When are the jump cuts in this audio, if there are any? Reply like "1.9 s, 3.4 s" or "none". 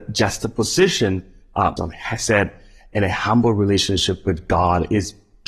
1.8 s